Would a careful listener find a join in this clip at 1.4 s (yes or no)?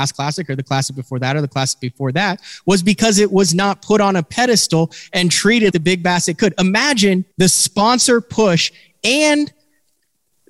no